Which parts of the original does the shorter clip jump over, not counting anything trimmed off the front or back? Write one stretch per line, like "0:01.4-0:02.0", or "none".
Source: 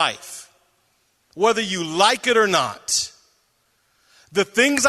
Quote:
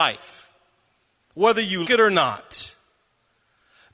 0:01.8-0:02.2